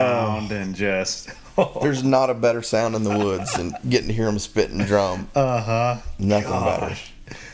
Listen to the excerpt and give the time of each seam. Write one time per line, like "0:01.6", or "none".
none